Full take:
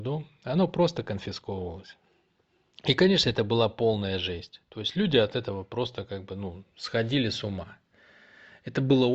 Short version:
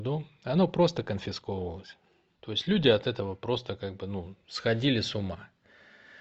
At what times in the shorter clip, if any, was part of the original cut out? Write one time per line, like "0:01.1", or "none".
0:02.3